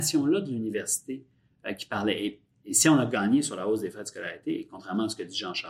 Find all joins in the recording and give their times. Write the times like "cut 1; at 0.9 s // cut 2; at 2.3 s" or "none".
none